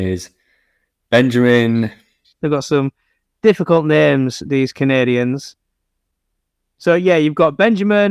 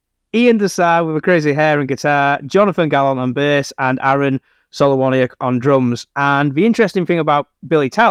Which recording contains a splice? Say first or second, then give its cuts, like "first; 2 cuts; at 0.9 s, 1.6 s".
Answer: first; 1 cut; at 2.3 s